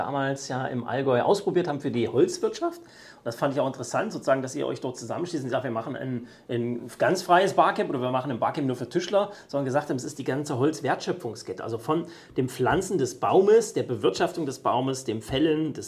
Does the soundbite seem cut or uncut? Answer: uncut